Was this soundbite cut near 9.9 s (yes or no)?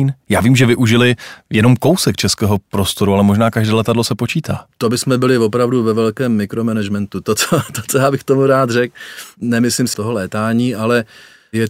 yes